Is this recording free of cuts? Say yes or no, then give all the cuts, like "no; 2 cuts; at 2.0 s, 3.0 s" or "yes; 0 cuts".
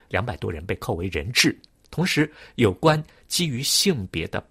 yes; 0 cuts